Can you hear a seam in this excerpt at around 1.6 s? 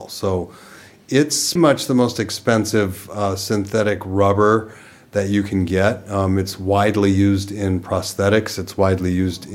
yes; 1 cut; at 1.6 s

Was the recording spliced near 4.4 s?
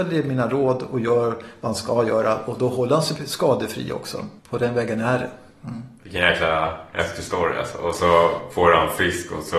yes; 1 cut; at 4.4 s

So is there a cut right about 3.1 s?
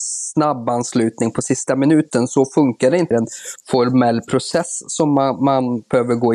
yes; 1 cut; at 3.1 s

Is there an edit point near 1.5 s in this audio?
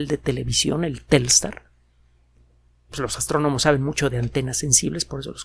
no; 1 cut; at 2.9 s

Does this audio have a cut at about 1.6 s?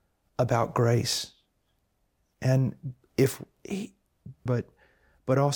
no; 1 cut; at 4.5 s

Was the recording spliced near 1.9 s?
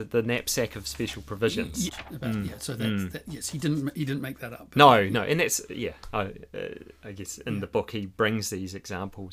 yes; 1 cut; at 1.9 s

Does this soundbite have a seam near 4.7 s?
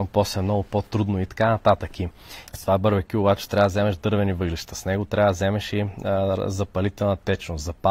no; 1 cut; at 2.5 s

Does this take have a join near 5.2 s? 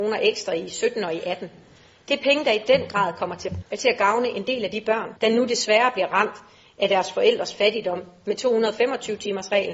yes; 2 cuts; at 3.6 s, 5.2 s

